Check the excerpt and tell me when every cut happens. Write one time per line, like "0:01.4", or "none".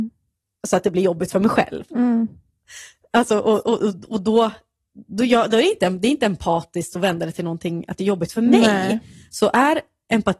none